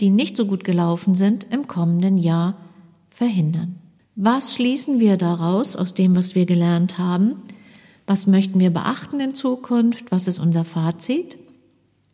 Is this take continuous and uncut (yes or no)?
no